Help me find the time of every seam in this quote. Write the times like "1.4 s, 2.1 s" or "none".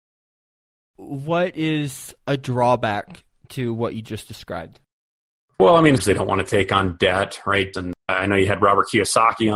6.0 s, 7.7 s